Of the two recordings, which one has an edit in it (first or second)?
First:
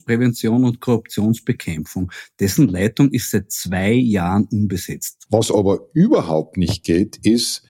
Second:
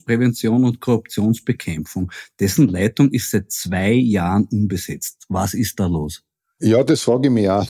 first